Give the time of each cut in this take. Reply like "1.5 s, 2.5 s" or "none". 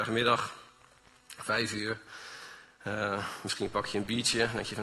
none